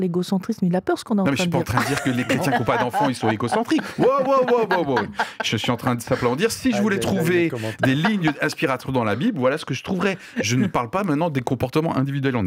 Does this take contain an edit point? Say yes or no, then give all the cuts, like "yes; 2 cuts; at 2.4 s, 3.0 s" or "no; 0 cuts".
no; 0 cuts